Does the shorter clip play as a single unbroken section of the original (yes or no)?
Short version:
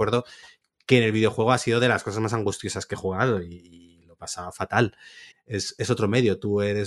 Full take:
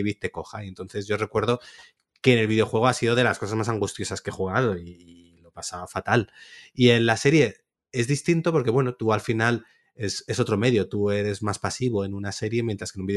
no